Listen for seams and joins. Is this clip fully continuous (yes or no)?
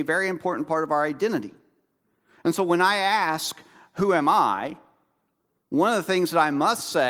yes